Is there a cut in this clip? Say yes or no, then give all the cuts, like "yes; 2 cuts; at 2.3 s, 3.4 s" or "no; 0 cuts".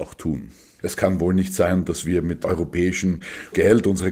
no; 0 cuts